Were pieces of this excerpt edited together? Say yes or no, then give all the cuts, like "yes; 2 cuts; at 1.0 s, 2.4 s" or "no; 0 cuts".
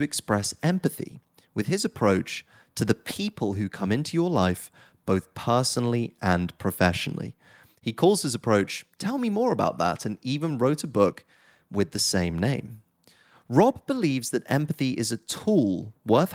no; 0 cuts